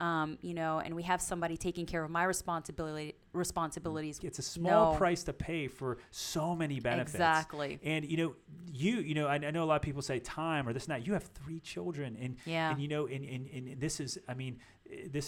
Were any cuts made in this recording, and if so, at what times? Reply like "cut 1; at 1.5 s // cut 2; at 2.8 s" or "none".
cut 1; at 4.2 s